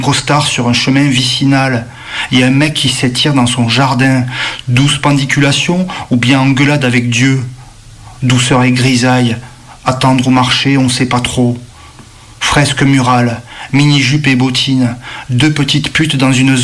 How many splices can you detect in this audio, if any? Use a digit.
2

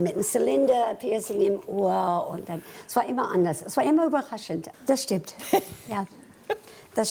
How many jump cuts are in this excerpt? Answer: 1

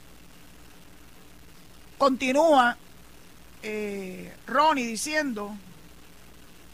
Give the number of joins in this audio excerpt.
0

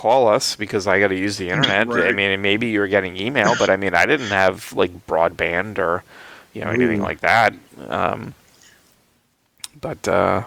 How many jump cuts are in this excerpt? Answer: 0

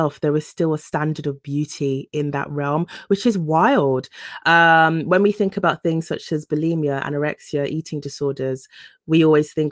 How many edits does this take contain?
0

